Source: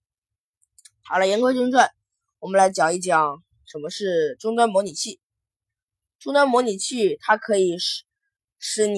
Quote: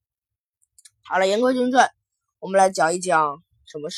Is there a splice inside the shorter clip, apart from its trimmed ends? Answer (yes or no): no